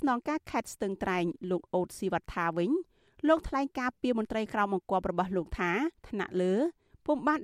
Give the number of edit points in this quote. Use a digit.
1